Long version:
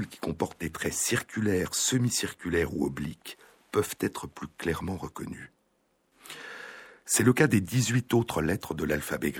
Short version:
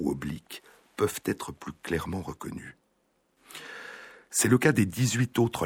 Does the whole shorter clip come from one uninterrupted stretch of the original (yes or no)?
yes